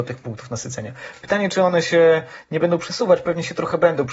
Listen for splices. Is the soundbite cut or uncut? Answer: uncut